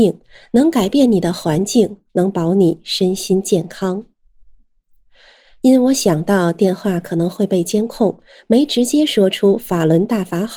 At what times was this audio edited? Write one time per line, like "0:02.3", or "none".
none